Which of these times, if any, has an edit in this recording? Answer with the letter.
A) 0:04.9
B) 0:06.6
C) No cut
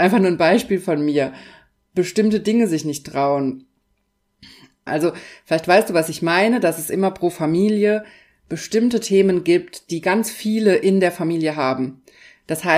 A